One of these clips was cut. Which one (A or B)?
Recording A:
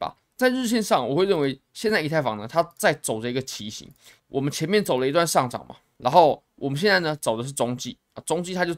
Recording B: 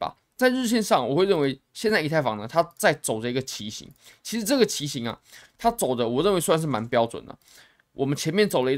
A